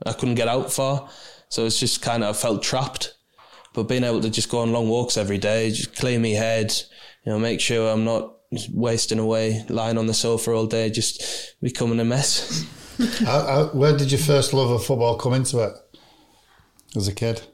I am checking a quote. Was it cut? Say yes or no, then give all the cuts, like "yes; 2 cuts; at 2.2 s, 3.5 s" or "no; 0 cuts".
no; 0 cuts